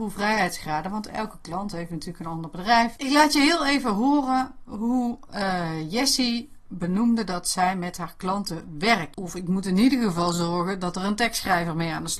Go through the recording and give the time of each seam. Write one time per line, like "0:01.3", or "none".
0:03.0
0:09.1